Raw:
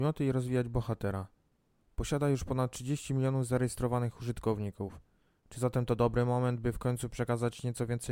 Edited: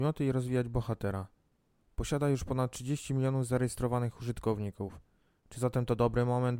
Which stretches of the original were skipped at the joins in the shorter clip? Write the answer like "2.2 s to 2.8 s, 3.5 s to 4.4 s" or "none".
none